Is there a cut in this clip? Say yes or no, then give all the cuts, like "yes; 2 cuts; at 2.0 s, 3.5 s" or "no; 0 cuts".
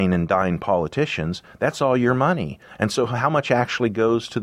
no; 0 cuts